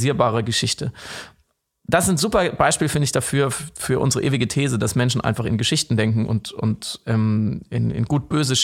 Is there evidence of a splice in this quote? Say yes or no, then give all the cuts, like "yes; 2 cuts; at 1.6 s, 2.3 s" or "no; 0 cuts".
no; 0 cuts